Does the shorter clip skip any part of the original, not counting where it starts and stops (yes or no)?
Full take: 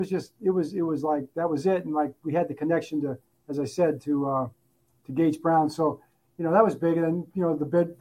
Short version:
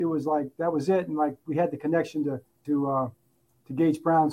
yes